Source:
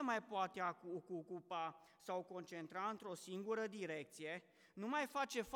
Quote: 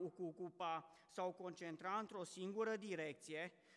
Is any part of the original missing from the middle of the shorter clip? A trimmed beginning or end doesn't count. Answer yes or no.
no